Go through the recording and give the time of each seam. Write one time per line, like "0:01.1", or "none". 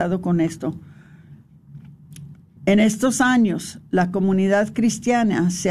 0:02.6